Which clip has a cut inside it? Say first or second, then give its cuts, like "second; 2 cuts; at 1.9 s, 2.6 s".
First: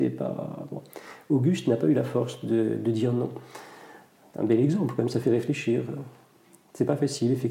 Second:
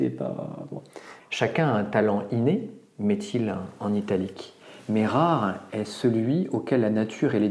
second; 1 cut; at 1.2 s